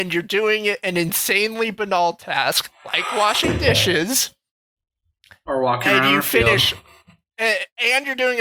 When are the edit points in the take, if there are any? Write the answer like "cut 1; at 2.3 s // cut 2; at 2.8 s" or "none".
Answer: none